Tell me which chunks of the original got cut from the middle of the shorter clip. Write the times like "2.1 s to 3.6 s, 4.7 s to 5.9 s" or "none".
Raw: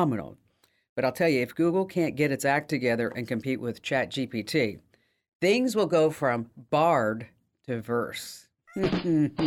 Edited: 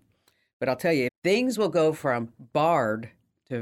1.4 s to 5.2 s